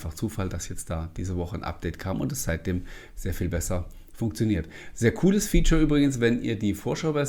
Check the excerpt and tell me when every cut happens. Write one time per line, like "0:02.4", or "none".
none